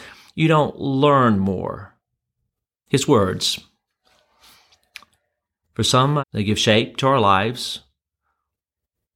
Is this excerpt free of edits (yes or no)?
no